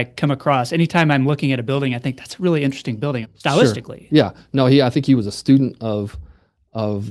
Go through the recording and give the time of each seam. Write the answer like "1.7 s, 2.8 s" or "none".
3.2 s